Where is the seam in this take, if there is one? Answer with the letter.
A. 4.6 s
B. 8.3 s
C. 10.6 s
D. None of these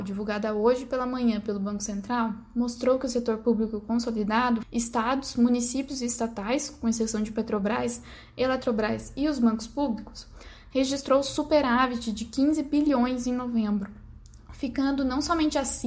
A